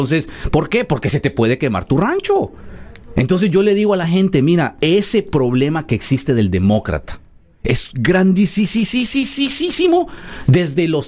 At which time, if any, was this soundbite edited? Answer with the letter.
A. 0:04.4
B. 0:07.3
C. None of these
C